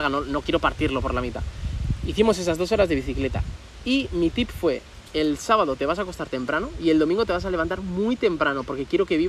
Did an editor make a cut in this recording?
no; 0 cuts

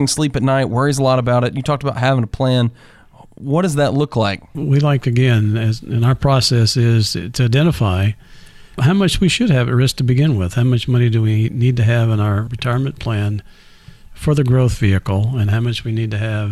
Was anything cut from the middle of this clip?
no; 0 cuts

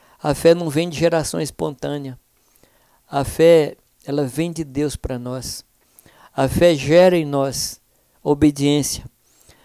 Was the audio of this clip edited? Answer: no; 0 cuts

